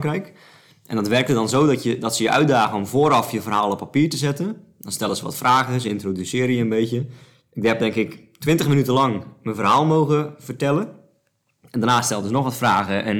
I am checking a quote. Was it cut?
no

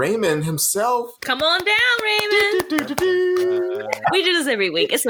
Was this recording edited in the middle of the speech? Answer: yes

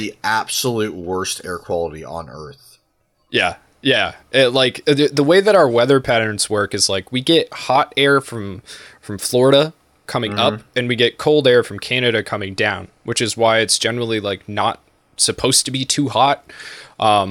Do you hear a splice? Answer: no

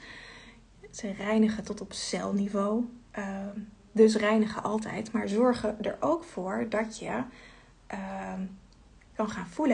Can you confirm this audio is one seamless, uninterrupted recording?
yes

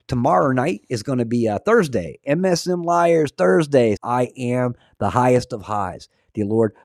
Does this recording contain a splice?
yes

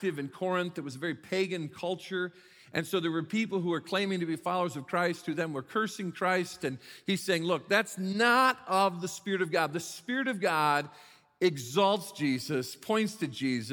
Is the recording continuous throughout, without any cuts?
yes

